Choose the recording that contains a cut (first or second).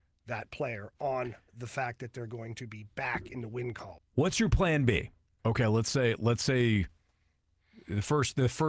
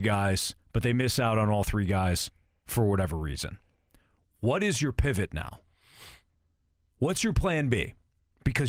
first